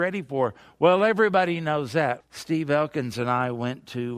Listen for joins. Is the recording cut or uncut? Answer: cut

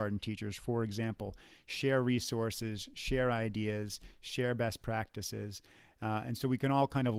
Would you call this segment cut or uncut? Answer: uncut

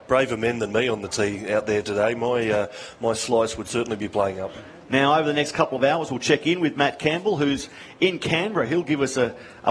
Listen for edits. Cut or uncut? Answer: uncut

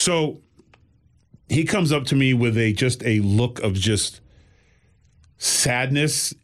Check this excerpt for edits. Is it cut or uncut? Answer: uncut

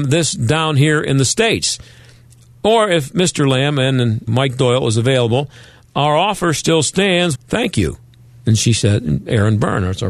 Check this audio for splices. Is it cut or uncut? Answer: cut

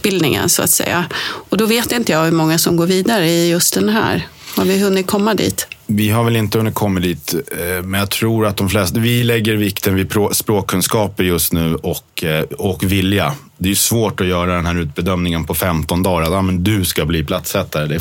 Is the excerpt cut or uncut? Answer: uncut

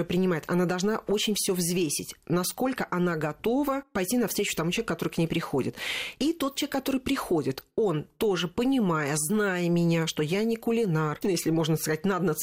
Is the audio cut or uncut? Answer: cut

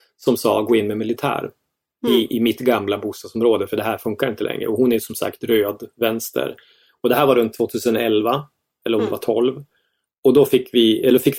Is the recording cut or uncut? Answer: uncut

